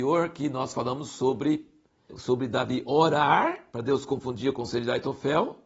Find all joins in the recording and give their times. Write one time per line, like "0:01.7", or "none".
0:02.1